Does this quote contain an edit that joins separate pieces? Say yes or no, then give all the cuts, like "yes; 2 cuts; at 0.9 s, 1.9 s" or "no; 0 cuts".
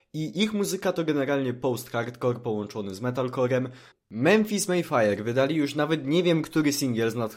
yes; 1 cut; at 3.9 s